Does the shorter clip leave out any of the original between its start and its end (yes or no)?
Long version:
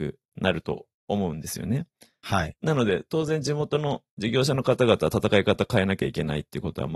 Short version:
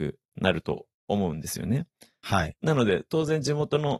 no